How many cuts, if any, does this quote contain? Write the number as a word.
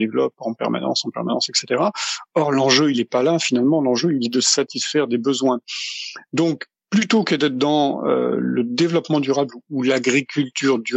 zero